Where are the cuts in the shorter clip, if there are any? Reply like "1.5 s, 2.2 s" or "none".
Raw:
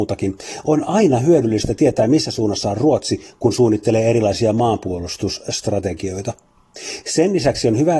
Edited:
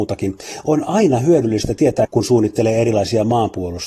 2.0 s